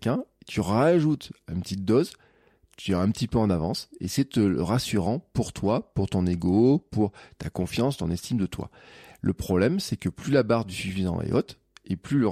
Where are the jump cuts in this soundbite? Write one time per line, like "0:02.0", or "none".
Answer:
none